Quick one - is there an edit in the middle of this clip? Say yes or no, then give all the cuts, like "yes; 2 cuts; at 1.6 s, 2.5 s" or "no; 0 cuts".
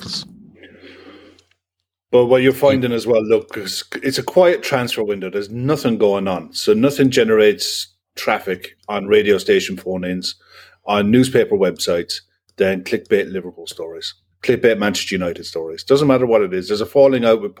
no; 0 cuts